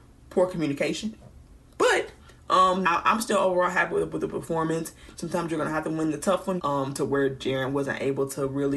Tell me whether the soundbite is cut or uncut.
cut